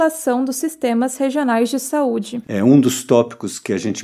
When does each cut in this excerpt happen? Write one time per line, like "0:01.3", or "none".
0:02.4